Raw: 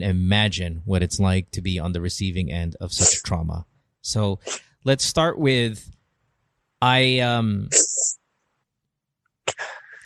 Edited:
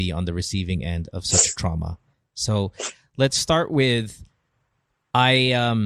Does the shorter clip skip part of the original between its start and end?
no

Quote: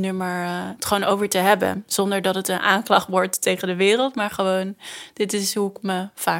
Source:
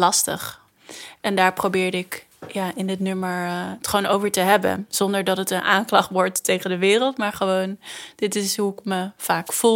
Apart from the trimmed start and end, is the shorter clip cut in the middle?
no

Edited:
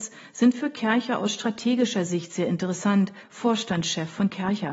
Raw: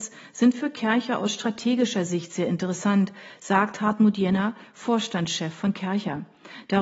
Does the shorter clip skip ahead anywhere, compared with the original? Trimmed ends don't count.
yes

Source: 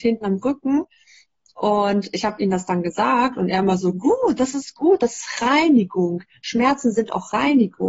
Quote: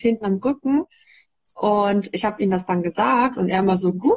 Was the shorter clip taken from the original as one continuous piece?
yes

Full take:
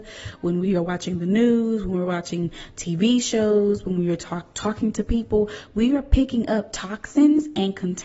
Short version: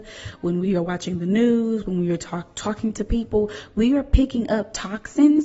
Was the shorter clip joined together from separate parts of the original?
yes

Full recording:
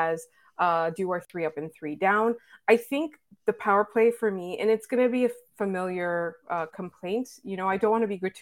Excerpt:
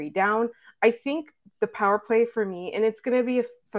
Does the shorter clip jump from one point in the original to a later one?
no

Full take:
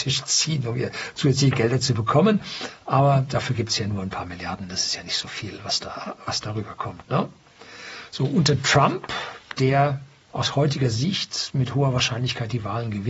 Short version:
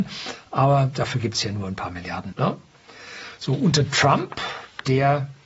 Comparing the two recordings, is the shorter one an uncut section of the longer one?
no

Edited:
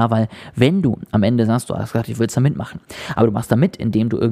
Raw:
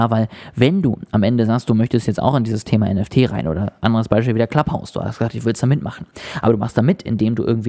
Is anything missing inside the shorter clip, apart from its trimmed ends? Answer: yes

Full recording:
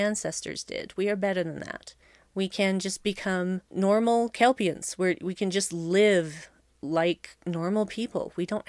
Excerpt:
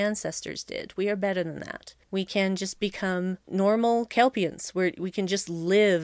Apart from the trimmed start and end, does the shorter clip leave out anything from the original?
yes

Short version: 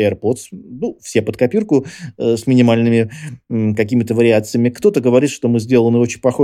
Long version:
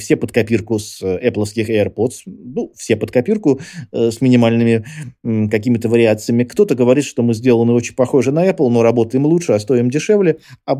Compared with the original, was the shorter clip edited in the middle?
no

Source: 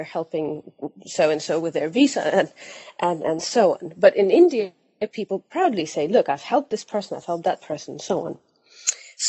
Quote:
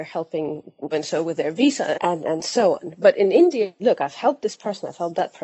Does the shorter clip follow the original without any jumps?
no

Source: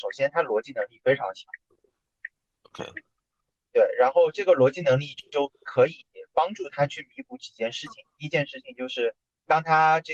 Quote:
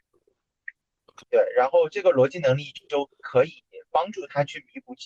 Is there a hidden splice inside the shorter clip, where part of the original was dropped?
yes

